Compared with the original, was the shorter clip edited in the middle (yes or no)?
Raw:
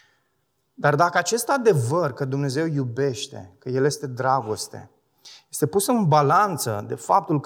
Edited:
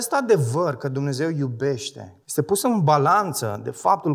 yes